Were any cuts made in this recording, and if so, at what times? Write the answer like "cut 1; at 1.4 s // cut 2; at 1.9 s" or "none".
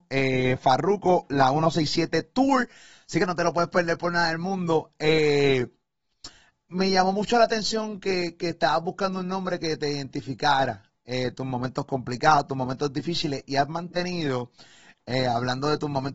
cut 1; at 6.7 s